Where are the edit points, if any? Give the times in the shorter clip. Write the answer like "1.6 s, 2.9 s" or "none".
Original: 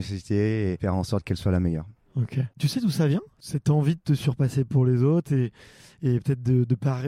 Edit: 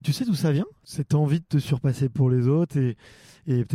none